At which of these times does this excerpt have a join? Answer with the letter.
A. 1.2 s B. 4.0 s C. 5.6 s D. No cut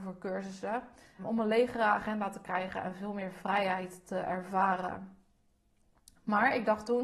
A